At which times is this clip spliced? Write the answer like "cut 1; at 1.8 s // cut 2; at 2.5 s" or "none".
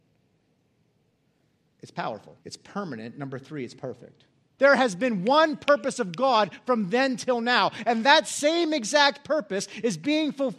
cut 1; at 2.4 s // cut 2; at 4.6 s